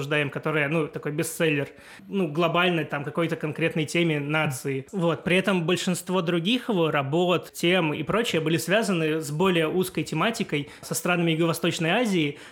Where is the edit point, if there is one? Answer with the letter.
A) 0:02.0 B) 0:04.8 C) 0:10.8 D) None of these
A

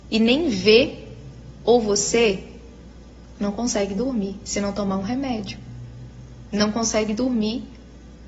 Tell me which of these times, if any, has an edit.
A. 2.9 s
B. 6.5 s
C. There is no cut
C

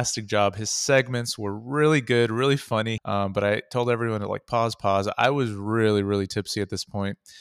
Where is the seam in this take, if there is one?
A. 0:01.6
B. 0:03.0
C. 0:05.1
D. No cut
B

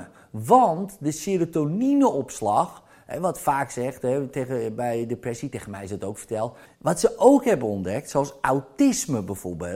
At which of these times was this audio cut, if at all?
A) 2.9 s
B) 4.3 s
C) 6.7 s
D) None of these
C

